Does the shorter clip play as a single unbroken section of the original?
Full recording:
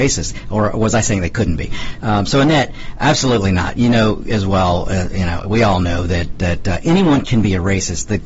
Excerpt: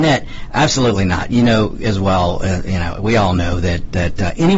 yes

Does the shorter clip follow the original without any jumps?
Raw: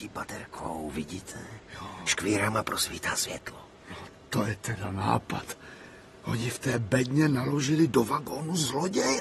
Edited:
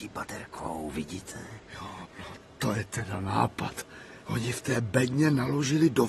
no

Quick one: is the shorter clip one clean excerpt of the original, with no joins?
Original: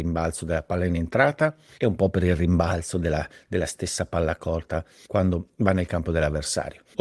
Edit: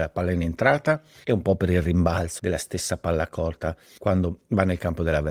no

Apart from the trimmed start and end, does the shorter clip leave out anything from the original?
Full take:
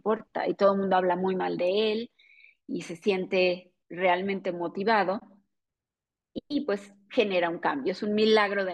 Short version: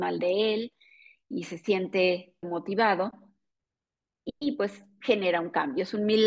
yes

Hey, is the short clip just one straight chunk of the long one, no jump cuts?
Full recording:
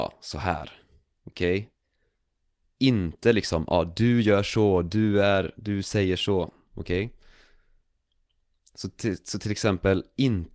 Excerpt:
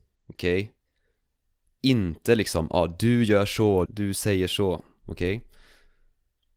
no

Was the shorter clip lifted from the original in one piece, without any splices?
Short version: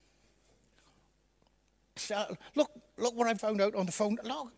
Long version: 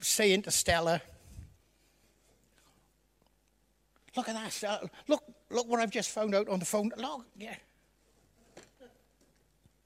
no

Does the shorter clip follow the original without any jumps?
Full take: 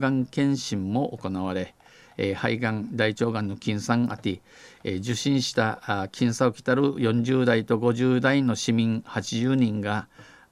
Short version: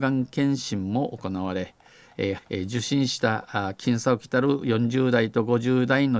no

